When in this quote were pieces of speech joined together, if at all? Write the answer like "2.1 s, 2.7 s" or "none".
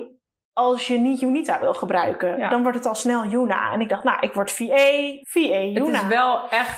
5.2 s

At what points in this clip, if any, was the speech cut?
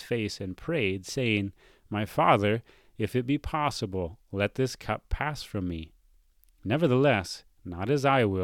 none

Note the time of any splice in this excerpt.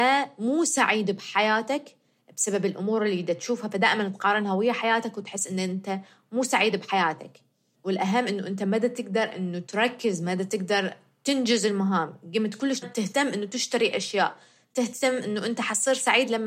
12.8 s

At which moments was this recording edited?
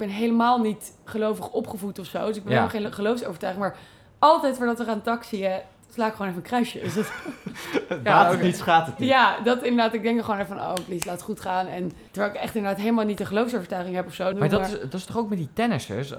12.1 s, 14.3 s

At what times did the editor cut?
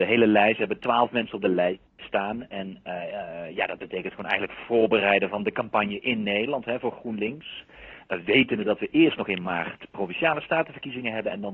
none

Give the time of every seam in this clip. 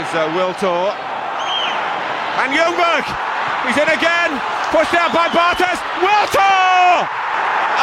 none

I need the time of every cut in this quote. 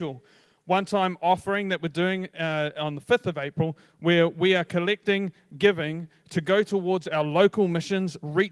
none

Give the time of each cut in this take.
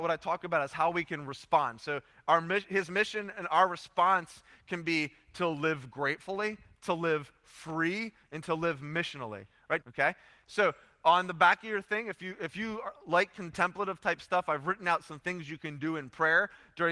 9.8 s

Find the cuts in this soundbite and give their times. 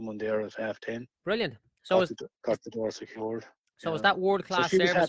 none

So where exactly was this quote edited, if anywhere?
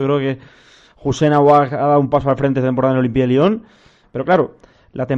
4.0 s

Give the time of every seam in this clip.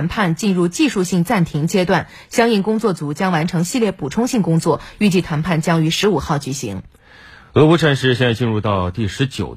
none

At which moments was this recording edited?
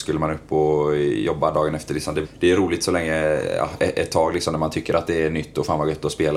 2.2 s

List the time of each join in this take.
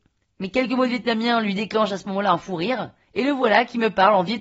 none

